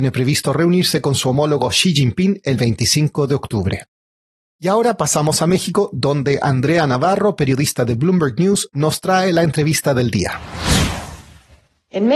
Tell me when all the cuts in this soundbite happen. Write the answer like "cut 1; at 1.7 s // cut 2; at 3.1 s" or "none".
none